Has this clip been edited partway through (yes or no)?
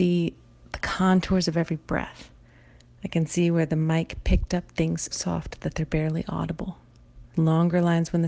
yes